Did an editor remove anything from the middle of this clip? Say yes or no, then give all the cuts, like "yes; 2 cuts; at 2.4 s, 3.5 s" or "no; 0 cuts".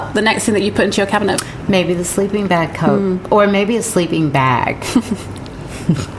no; 0 cuts